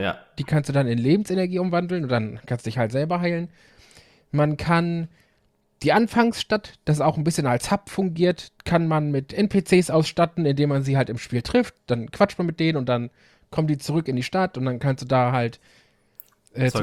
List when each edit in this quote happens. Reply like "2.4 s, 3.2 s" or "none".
none

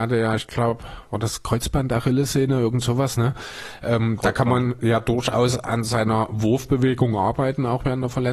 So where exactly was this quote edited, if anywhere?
none

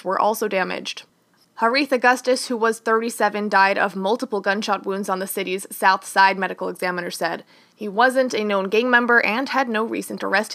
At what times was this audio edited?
none

